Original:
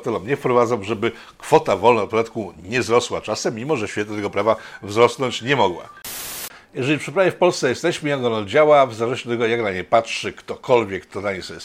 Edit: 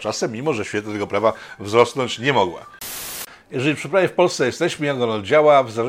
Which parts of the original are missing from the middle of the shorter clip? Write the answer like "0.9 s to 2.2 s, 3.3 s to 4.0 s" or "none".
none

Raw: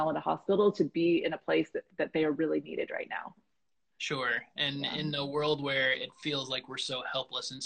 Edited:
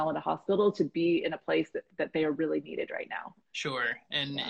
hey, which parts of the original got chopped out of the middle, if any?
3.4 s to 3.9 s

